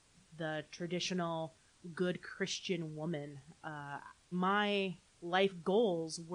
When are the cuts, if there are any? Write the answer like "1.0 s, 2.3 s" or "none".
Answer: 4.3 s